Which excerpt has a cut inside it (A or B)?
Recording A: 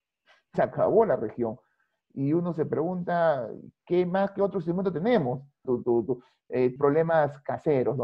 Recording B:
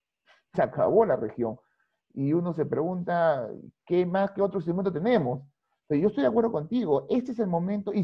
A